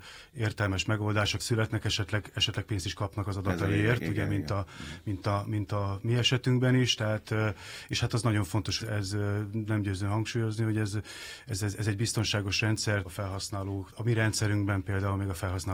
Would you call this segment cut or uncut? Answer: cut